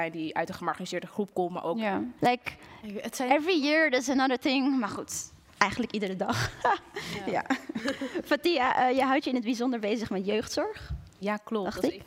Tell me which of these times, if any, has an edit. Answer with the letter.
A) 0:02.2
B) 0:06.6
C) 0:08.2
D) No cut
A